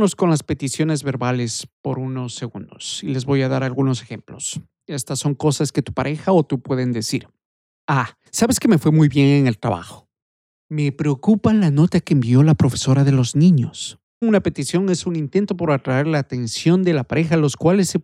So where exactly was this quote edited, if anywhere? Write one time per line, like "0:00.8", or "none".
0:08.3
0:14.2